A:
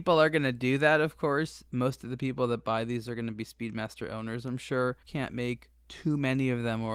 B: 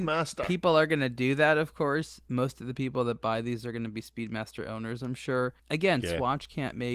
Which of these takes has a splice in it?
A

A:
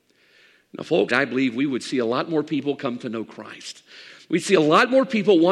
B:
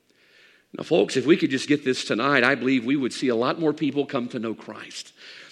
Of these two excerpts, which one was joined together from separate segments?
A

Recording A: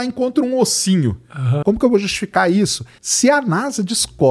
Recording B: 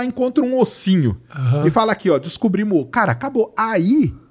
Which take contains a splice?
A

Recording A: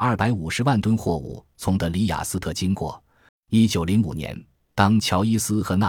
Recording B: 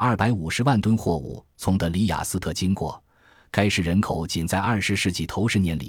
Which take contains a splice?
A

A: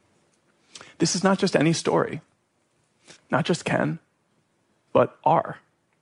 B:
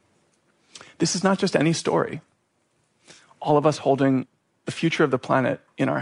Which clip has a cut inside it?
A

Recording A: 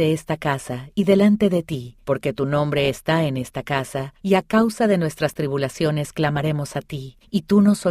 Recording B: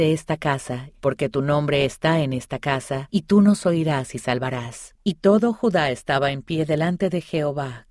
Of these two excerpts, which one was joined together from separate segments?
B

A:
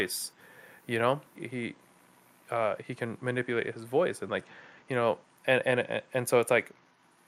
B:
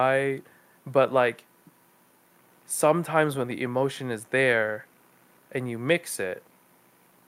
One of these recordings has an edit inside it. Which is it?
A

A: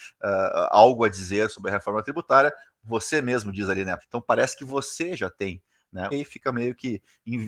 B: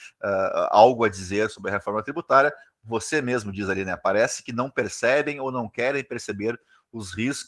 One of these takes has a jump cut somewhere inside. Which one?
A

